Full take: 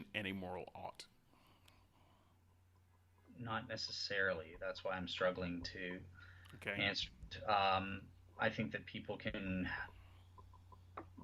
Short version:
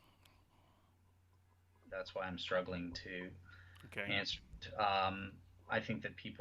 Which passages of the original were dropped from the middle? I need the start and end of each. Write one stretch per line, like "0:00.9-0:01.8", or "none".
0:03.3-0:04.6